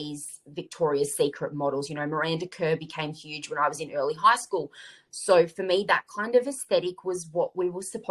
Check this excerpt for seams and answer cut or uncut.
uncut